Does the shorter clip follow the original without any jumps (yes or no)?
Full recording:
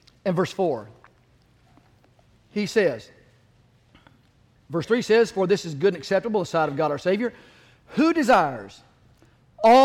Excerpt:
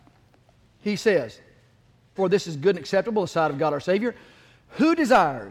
no